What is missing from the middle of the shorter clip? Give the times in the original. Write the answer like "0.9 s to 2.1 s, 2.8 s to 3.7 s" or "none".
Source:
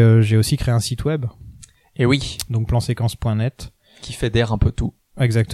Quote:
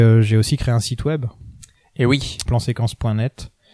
2.5 s to 2.7 s